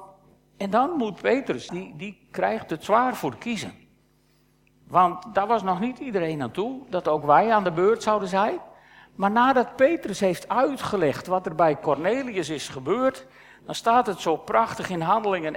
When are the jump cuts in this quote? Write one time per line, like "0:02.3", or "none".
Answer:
0:01.7